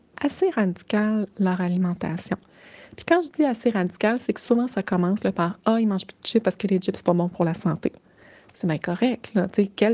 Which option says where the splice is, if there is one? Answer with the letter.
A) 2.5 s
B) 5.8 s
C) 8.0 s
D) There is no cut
D